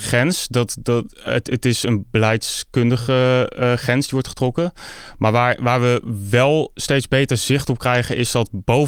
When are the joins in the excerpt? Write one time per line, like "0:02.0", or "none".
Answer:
none